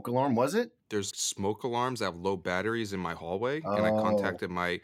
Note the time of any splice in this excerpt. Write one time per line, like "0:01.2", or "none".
0:01.1